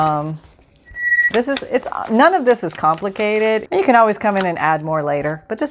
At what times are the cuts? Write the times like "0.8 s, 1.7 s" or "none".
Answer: 1.3 s, 3.7 s